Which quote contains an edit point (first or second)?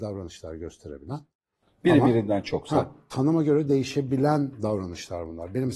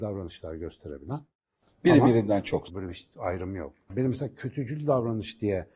second